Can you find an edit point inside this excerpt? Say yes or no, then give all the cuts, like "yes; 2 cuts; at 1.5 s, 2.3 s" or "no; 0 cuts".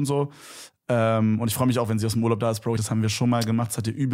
yes; 1 cut; at 2.8 s